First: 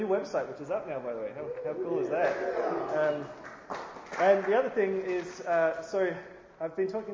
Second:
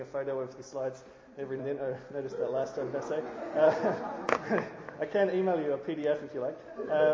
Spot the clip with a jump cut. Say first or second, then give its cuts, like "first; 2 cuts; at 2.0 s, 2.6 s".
second; 1 cut; at 1.6 s